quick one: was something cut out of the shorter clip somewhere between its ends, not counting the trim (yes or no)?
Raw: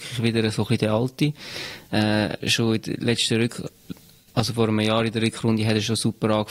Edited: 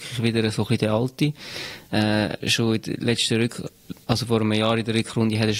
yes